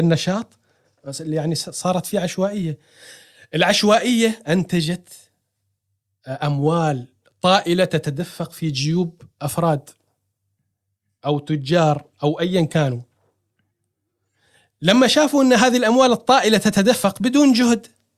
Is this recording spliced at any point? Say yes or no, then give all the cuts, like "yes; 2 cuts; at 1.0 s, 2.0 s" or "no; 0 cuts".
no; 0 cuts